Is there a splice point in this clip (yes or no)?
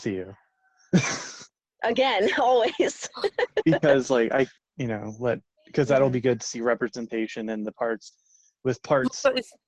yes